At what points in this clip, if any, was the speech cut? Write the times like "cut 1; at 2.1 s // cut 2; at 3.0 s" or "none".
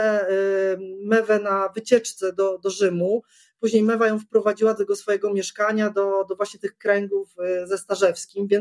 none